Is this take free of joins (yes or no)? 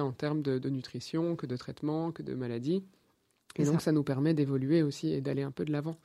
yes